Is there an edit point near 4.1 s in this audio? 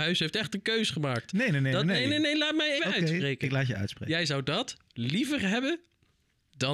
no; 1 cut; at 2.8 s

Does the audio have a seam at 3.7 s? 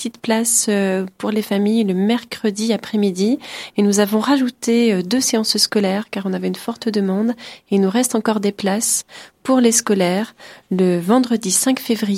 no; 0 cuts

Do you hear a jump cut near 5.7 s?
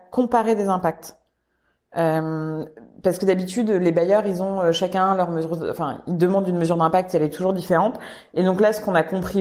no; 0 cuts

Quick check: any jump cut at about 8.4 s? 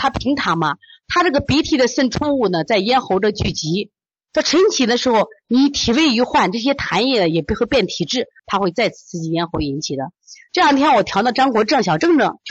yes; 1 cut; at 8.4 s

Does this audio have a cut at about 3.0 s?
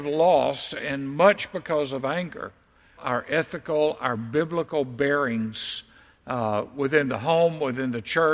yes; 1 cut; at 3.0 s

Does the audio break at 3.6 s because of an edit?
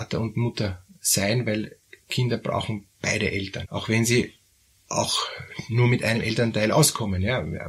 yes; 1 cut; at 3.6 s

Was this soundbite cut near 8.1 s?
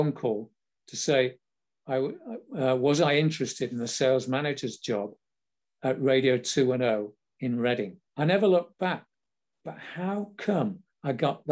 yes; 1 cut; at 8.1 s

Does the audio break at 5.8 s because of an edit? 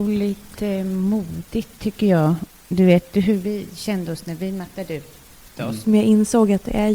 yes; 1 cut; at 5.8 s

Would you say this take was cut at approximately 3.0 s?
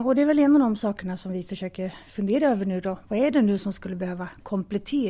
no; 0 cuts

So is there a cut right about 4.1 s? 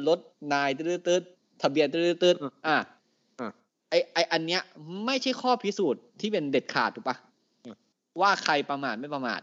no; 0 cuts

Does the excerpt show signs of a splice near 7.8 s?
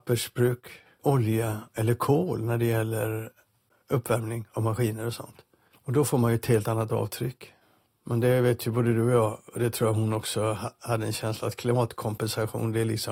yes; 2 cuts; at 7.8 s, 9.5 s

